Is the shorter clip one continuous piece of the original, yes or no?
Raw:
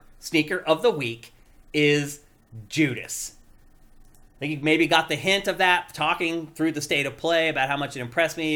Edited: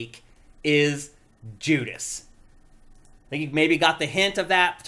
yes